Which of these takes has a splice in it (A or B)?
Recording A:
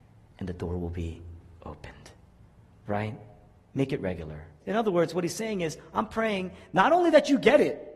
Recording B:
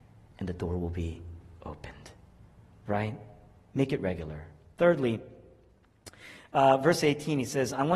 A